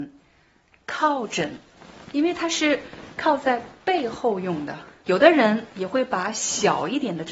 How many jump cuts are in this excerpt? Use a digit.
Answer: 1